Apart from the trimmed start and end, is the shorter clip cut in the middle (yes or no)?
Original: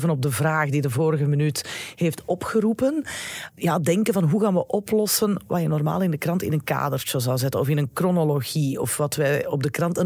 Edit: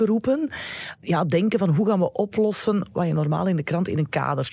no